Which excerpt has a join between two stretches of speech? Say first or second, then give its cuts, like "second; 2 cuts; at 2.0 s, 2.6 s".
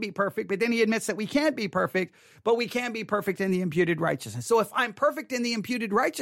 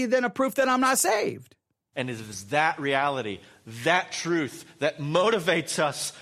second; 1 cut; at 1.9 s